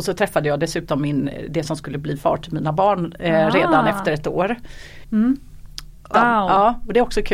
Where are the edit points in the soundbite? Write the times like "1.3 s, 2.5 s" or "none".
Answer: 5.0 s, 6.1 s